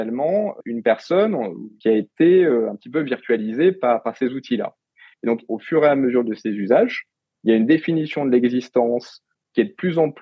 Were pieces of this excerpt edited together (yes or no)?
no